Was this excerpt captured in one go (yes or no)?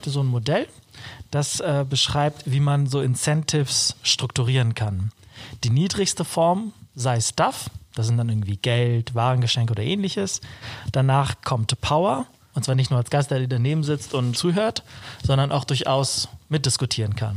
no